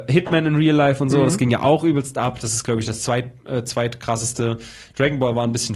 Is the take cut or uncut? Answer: uncut